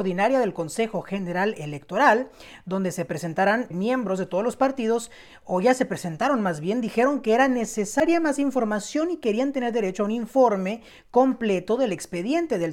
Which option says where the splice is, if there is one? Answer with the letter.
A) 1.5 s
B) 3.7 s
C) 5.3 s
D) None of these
B